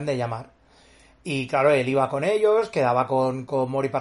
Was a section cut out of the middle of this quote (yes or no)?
no